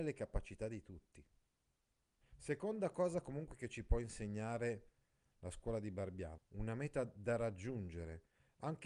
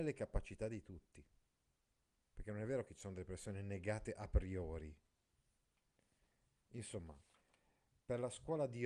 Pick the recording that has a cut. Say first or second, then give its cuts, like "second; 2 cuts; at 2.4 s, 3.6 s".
first; 2 cuts; at 2.2 s, 6.4 s